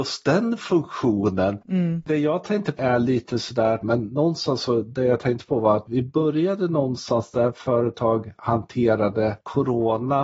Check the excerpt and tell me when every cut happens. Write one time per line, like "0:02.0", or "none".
0:01.6
0:03.8